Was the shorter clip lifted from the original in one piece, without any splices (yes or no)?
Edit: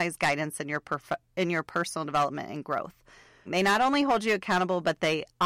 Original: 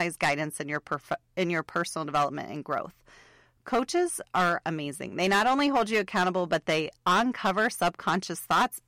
no